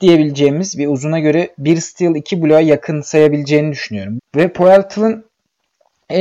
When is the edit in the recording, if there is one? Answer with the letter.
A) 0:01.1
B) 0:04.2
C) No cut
B